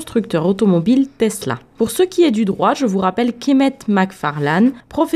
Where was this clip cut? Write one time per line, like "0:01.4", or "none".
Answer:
none